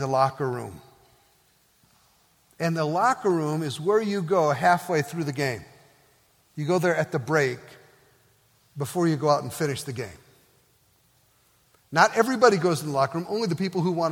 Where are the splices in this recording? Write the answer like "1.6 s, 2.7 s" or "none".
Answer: none